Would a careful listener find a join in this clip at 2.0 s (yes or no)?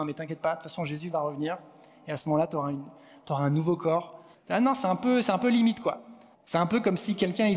no